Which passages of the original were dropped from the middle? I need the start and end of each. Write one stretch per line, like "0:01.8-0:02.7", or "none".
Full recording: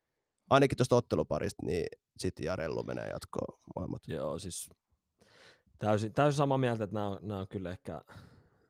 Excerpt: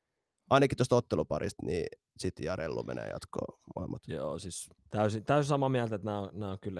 0:04.8-0:05.7